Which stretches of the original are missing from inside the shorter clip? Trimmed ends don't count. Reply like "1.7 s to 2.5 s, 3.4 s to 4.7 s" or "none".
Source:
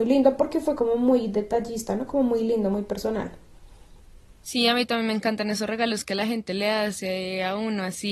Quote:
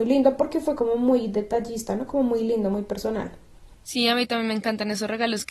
3.7 s to 4.3 s